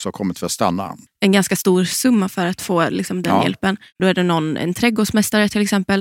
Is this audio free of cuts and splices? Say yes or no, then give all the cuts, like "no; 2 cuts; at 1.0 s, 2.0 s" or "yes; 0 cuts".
no; 2 cuts; at 1.1 s, 4.0 s